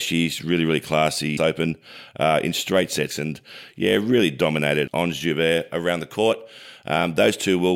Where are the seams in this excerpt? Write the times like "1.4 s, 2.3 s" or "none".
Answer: 1.4 s, 3.1 s, 4.9 s